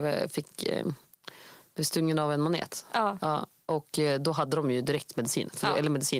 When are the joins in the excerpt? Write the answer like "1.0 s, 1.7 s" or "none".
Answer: none

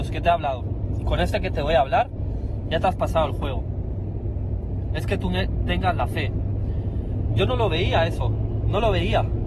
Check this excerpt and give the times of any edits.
4.9 s, 7.3 s

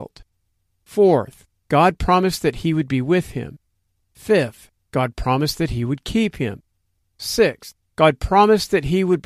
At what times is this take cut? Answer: none

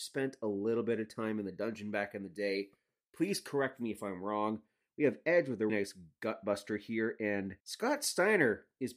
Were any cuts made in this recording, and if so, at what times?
5.7 s, 7.6 s

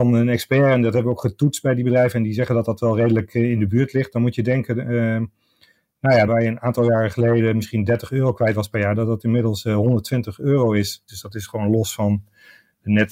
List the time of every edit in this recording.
6.3 s, 11.1 s

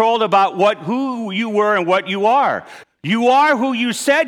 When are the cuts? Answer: 2.8 s

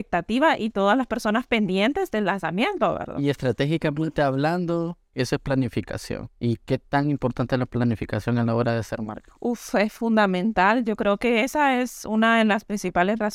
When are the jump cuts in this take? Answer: 5.1 s

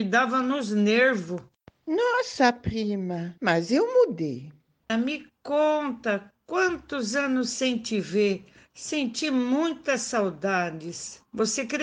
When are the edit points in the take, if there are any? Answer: 3.4 s, 4.9 s

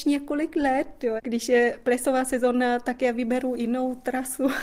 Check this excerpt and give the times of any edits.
1.2 s

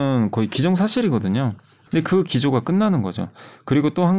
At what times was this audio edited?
1.9 s

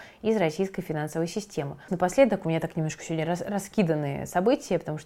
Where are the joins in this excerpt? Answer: 1.9 s

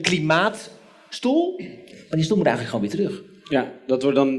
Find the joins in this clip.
1.9 s

